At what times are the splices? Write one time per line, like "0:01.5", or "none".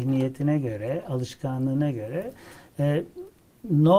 none